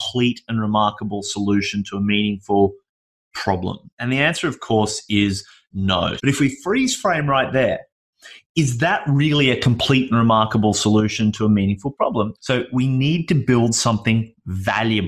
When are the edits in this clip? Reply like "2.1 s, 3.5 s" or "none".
6.2 s, 12.4 s